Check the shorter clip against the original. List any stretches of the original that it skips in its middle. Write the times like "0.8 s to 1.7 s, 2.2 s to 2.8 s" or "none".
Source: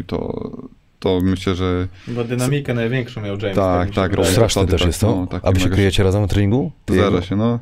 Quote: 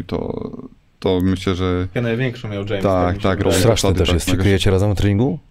2.0 s to 2.7 s, 5.0 s to 5.6 s